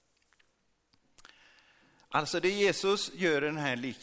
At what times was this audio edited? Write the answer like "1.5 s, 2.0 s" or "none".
none